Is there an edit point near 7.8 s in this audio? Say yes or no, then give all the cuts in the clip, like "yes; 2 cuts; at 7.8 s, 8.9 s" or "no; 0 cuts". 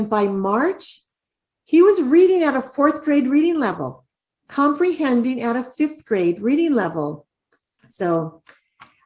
yes; 1 cut; at 7.8 s